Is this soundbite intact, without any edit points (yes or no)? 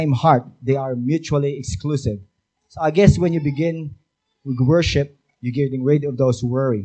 yes